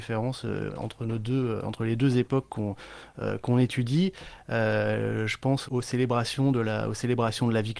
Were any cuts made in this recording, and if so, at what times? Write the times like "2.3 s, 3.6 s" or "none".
5.7 s